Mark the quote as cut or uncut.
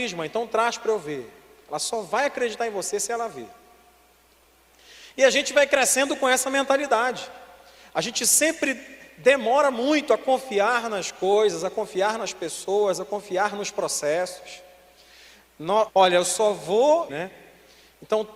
cut